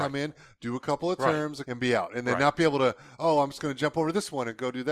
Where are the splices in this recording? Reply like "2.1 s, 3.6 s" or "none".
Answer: 1.6 s